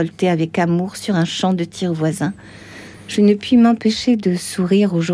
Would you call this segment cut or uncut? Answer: uncut